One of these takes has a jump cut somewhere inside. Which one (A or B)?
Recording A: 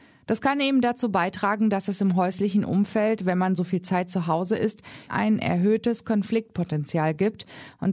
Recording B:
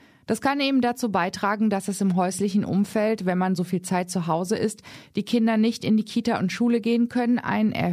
A